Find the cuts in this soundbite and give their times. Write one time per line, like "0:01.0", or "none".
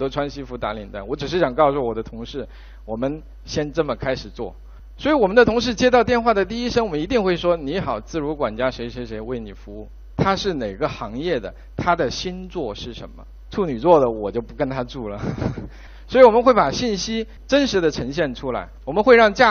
0:10.1
0:13.5

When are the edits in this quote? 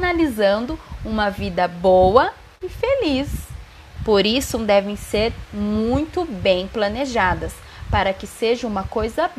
0:04.0

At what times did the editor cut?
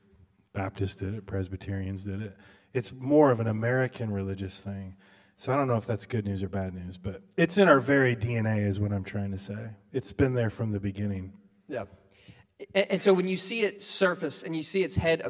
none

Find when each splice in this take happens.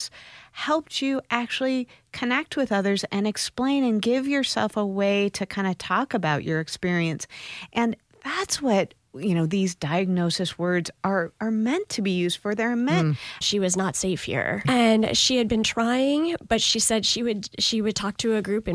0:13.4
0:14.6

